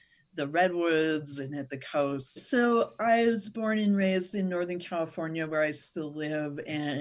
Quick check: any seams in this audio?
yes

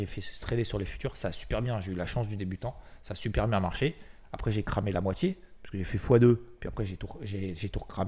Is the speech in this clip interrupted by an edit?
no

